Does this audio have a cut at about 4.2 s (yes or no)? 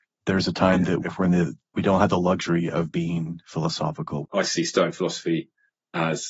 yes